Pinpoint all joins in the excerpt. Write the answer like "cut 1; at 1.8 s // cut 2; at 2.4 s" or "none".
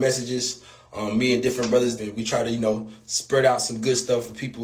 cut 1; at 2.0 s

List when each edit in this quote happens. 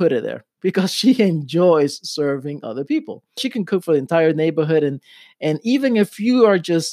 cut 1; at 3.4 s

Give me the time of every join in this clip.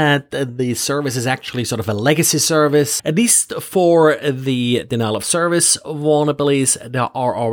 cut 1; at 3.0 s

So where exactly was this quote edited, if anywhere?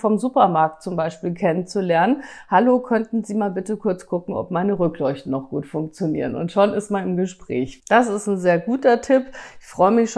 cut 1; at 7.8 s

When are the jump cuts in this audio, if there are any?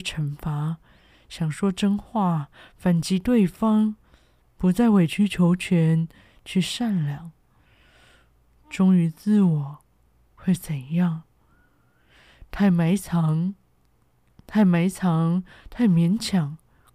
none

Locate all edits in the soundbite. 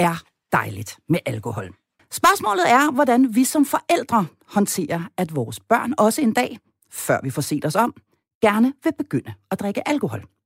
cut 1; at 2.0 s

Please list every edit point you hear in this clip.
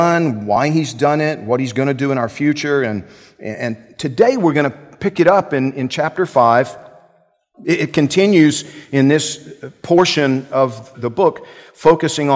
cut 1; at 10.9 s

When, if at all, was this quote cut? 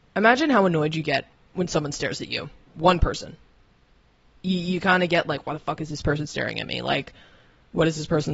none

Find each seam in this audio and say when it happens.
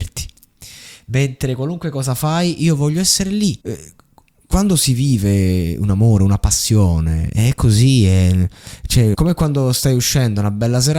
cut 1; at 3.6 s // cut 2; at 9.1 s

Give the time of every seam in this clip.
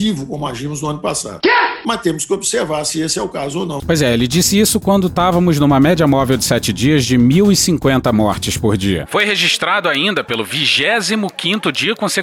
cut 1; at 3.8 s // cut 2; at 9.1 s

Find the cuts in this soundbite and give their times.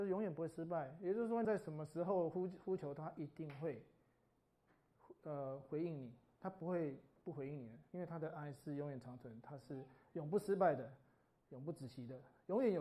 cut 1; at 1.4 s

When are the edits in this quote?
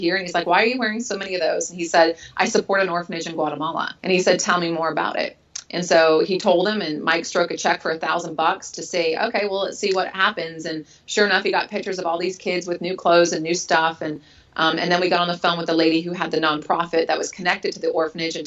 cut 1; at 4.0 s

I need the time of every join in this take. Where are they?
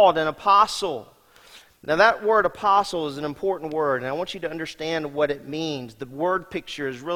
none

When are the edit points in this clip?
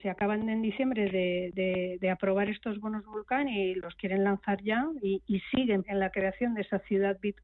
cut 1; at 5.8 s

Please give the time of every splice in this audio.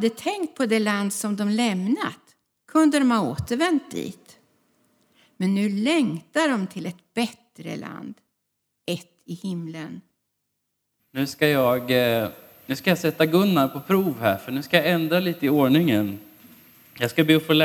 cut 1; at 11.0 s

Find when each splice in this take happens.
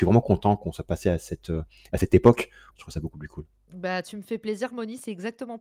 cut 1; at 2.7 s

